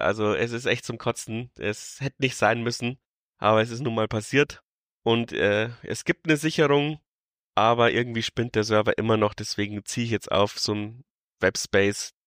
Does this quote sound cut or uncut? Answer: uncut